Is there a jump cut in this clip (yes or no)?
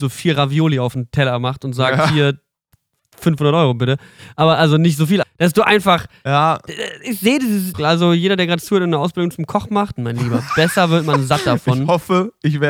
yes